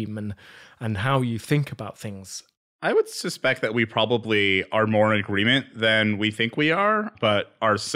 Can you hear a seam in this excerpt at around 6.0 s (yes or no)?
no